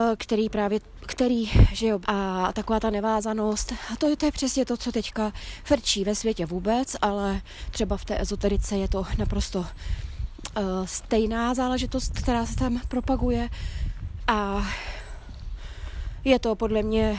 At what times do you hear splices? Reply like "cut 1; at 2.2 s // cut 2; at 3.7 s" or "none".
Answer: cut 1; at 2.0 s